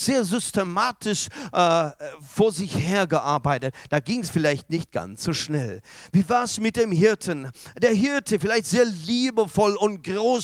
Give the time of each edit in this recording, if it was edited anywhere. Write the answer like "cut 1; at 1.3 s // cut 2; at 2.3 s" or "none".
none